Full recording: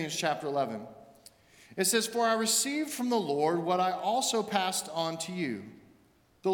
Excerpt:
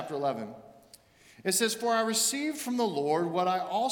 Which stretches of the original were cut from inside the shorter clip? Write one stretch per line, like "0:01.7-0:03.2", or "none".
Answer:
none